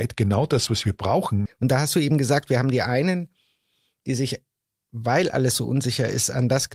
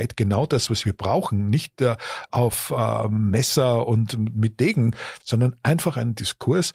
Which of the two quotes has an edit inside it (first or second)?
first